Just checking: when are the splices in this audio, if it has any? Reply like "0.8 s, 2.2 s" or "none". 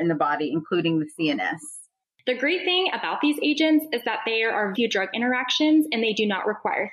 2.2 s, 4.7 s